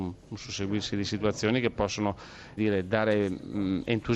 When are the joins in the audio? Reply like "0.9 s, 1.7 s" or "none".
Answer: 2.6 s